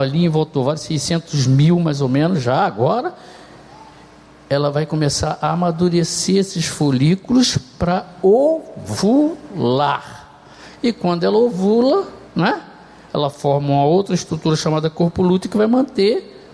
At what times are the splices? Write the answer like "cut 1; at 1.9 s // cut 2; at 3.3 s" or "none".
none